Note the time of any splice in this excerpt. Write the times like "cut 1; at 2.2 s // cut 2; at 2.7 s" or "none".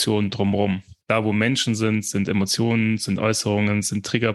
cut 1; at 1.0 s